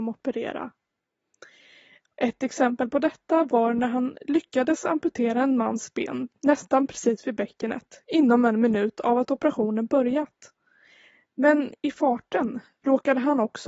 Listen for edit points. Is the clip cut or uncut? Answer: cut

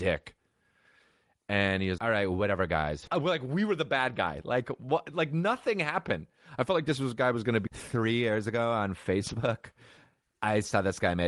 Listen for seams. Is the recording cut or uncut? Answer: cut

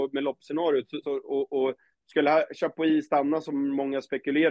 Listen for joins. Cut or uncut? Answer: cut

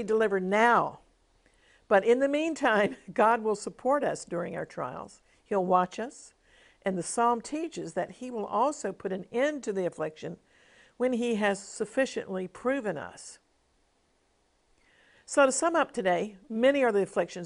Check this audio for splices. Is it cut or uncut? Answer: uncut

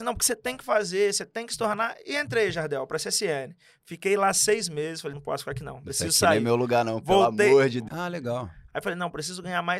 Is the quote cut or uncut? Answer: cut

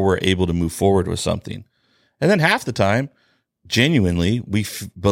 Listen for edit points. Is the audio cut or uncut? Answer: uncut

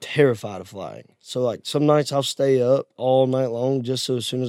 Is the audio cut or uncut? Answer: uncut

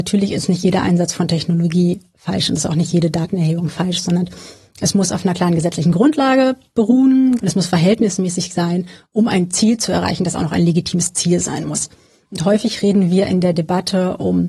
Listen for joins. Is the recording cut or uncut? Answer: cut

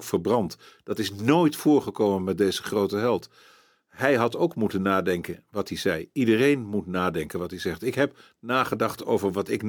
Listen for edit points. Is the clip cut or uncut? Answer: uncut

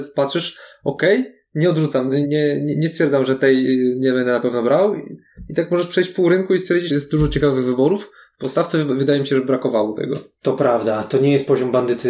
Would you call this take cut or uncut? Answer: cut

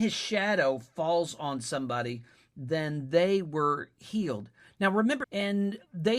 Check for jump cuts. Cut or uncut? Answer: cut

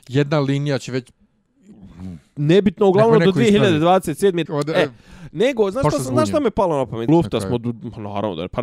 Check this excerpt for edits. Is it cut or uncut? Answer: cut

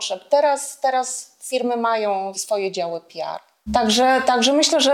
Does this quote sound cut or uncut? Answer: cut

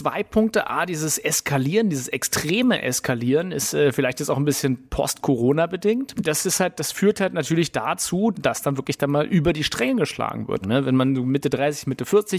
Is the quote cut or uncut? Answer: cut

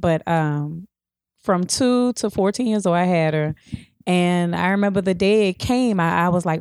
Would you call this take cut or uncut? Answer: uncut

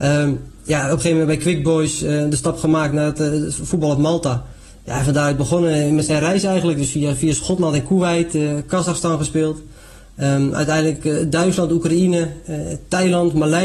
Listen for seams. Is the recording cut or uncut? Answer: uncut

